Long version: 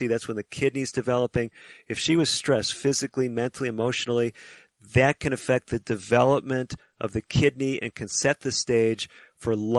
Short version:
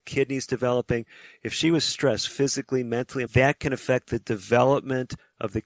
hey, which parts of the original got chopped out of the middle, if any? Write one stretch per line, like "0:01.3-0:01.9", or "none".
0:03.7-0:04.9